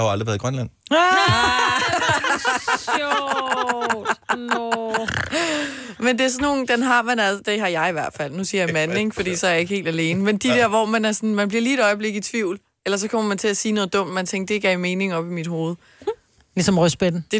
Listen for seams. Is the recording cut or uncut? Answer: uncut